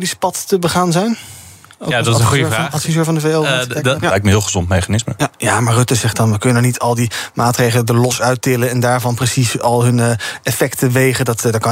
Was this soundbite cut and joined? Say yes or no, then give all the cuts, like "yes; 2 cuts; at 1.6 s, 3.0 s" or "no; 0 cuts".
yes; 1 cut; at 4.0 s